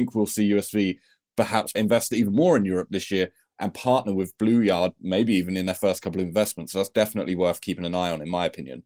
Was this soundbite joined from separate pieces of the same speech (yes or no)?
no